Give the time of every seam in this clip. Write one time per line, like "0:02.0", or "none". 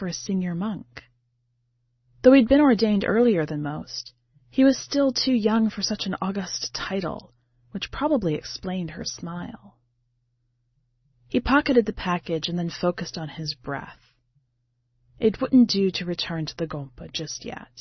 none

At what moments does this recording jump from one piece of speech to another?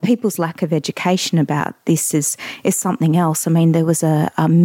none

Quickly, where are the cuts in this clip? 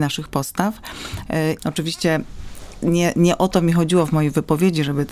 0:01.6

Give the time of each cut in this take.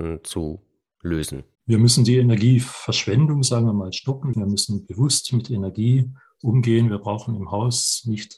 0:01.6
0:04.3

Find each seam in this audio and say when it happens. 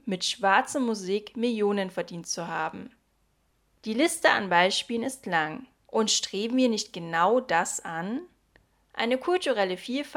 0:03.8
0:05.9

